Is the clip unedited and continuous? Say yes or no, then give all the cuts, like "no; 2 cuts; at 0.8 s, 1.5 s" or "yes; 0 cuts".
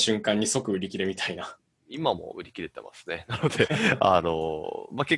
yes; 0 cuts